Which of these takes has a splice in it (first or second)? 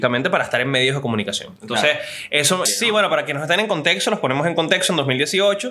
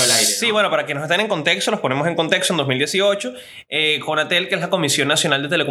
first